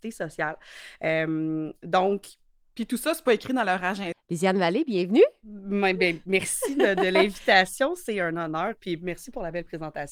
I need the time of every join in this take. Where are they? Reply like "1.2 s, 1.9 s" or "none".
4.1 s

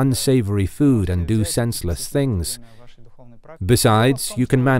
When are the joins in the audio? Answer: 3.6 s

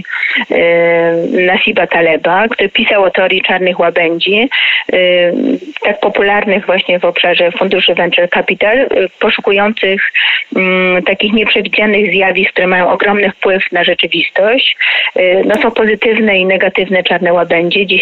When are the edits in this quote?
2.5 s

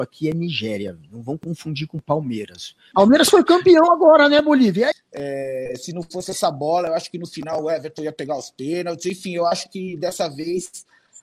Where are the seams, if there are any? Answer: 2.9 s, 4.9 s

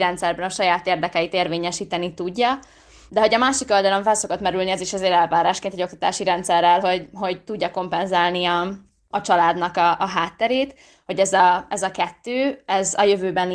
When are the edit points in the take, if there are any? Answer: none

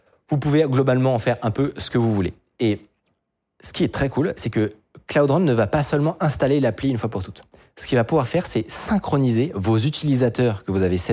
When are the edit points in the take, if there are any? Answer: none

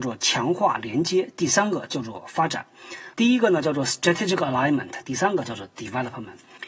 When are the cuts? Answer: 3.1 s, 5.0 s

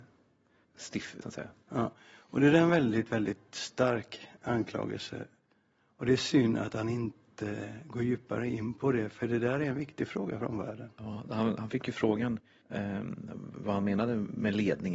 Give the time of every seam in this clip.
1.2 s

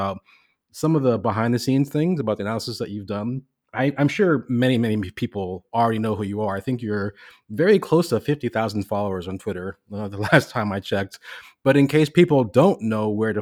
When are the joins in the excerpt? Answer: none

